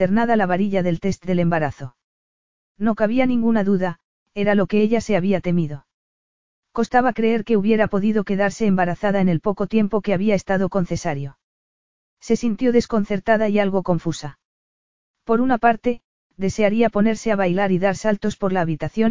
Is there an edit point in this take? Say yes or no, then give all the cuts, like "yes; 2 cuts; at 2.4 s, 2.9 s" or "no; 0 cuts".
no; 0 cuts